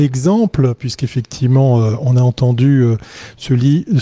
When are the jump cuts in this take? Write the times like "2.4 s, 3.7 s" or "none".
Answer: none